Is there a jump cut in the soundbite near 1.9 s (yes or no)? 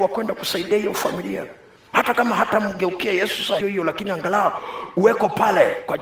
no